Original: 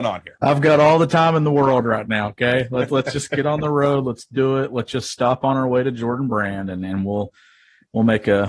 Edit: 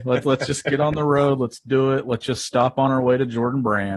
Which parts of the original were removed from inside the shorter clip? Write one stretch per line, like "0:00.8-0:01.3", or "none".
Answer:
none